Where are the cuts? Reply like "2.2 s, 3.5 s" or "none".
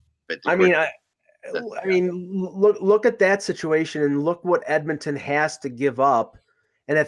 none